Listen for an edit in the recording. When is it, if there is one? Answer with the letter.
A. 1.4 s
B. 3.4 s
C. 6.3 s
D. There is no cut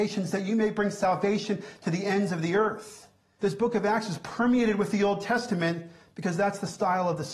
B